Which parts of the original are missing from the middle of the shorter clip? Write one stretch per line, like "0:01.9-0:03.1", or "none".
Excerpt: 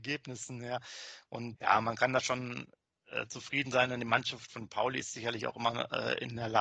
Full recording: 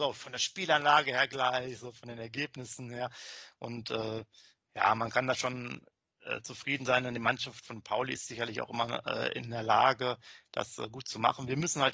0:03.8-0:04.7